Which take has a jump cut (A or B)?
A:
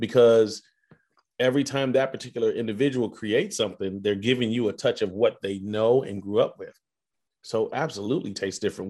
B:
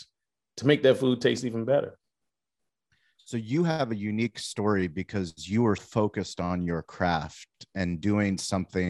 B